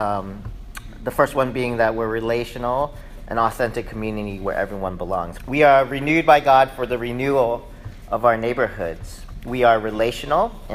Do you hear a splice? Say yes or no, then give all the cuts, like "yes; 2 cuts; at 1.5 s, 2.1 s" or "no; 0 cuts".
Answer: yes; 1 cut; at 5.4 s